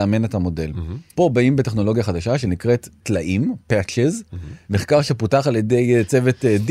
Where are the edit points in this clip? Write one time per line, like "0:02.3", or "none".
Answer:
0:04.6